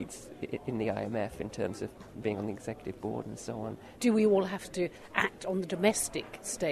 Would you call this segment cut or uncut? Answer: cut